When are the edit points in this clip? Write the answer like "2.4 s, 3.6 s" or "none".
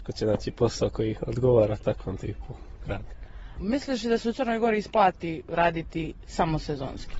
none